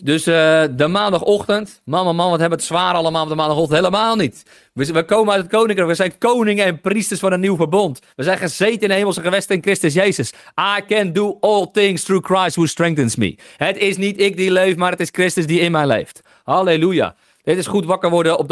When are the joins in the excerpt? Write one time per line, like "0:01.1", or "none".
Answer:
none